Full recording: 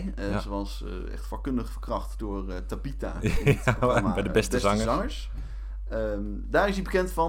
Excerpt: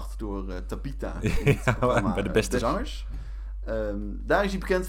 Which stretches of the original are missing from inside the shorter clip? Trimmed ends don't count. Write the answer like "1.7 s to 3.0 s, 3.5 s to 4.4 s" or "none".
4.6 s to 4.9 s

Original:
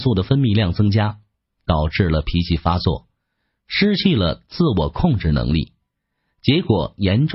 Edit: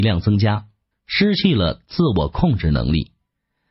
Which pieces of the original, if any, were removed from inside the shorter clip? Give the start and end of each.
1.4 s to 3.5 s

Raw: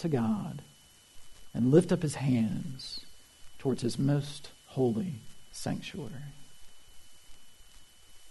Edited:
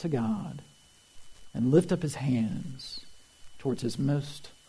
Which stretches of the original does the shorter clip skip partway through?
none

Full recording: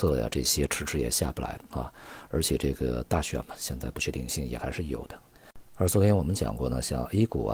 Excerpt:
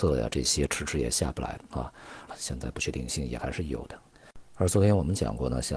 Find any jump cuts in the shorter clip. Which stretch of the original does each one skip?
2.3 s to 3.5 s

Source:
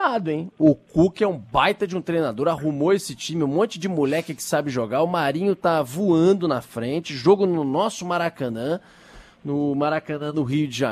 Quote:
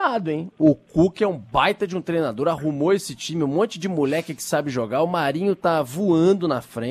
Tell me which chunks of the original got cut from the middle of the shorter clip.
none

